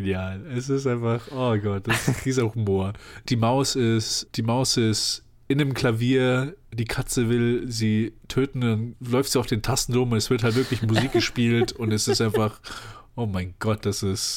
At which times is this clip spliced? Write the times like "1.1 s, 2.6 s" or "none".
3.2 s